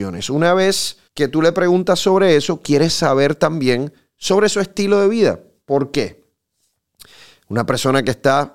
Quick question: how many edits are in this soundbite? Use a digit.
1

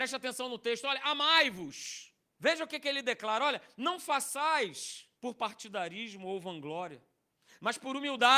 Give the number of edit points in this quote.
2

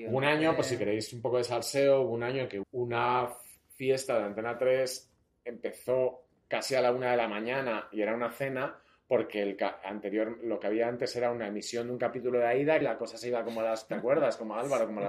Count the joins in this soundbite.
2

